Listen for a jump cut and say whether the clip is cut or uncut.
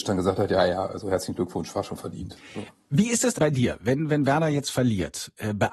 cut